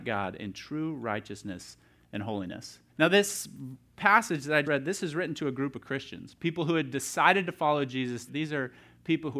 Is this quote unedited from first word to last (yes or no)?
no